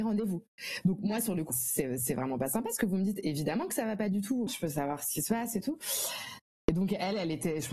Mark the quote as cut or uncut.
cut